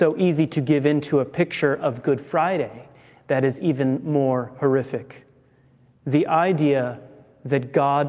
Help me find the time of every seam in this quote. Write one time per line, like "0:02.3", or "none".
none